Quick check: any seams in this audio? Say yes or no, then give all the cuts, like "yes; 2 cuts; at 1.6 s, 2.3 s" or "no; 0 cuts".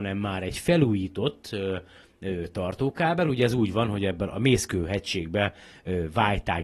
no; 0 cuts